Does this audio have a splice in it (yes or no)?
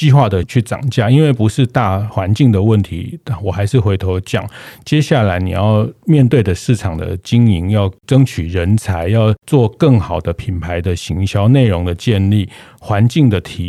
no